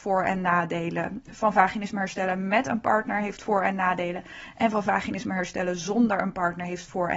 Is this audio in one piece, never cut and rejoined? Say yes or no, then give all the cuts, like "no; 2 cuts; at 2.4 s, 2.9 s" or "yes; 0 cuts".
yes; 0 cuts